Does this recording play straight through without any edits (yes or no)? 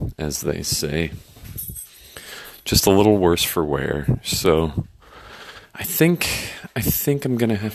yes